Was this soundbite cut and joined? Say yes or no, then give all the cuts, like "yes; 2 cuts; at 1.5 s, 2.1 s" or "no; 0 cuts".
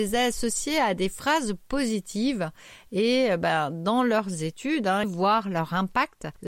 yes; 1 cut; at 5.0 s